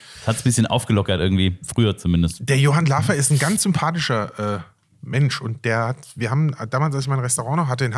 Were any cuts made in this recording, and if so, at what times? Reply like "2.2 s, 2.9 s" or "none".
none

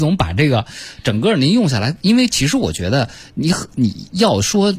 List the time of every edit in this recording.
none

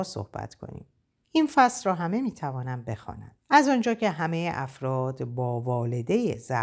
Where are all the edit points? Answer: 1.2 s, 3.4 s

